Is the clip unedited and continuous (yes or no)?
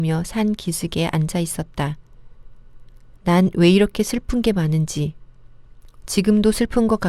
no